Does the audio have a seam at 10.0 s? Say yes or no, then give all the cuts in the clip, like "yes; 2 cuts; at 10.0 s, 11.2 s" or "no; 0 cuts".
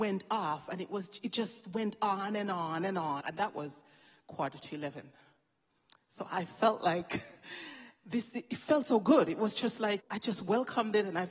yes; 2 cuts; at 3.2 s, 10.0 s